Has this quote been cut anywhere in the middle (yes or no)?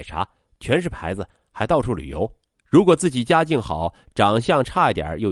yes